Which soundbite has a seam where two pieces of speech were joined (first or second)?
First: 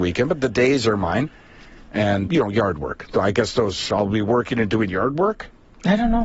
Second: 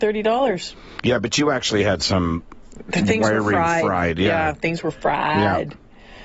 first